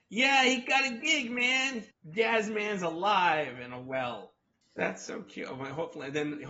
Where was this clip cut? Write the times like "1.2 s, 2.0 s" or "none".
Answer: 1.9 s, 4.6 s